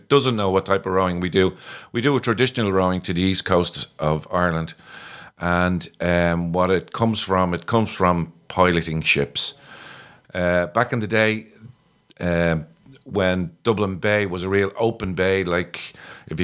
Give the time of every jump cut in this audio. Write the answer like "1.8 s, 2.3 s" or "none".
10.2 s